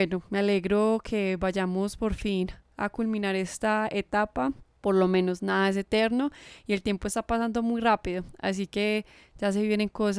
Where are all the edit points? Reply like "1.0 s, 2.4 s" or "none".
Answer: none

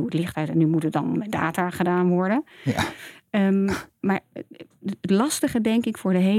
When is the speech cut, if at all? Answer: none

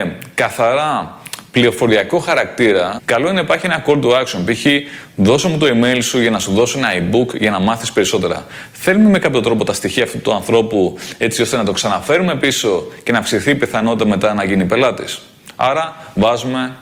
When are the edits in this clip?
3.0 s

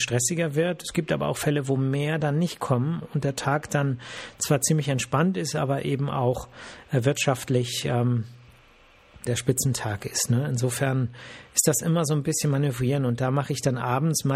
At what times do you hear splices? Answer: 9.3 s

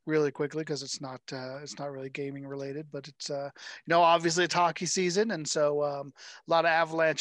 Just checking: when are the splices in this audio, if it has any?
none

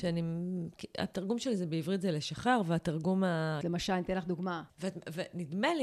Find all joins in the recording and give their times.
3.6 s, 4.7 s

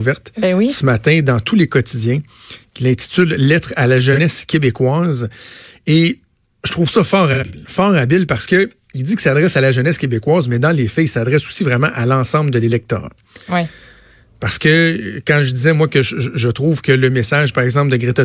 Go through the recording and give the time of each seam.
none

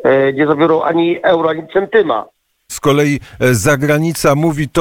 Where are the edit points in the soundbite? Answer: 2.7 s

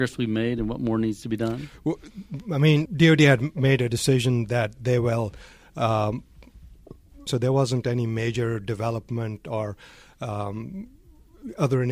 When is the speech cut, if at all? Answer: 2.9 s, 7.3 s

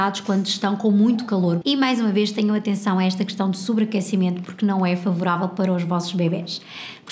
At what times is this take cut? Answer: 1.6 s

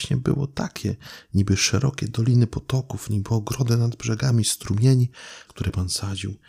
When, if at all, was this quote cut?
5.5 s

